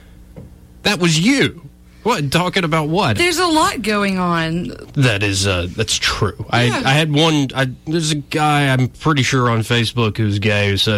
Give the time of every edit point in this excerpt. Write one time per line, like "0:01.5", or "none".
0:03.1
0:04.8